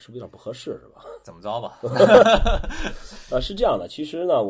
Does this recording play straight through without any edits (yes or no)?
yes